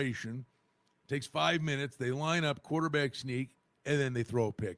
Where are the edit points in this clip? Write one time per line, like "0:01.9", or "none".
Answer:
0:03.8